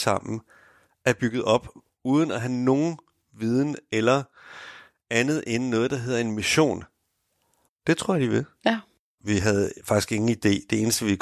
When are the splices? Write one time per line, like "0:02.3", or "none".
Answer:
0:07.7
0:09.2